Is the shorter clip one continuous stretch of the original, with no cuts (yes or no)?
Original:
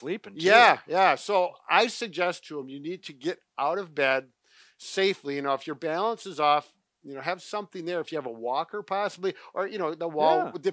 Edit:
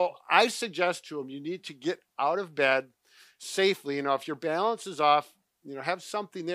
yes